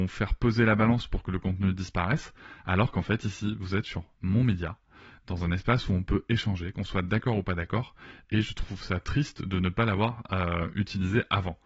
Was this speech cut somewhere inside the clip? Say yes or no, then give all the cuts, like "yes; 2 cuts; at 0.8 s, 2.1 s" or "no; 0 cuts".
no; 0 cuts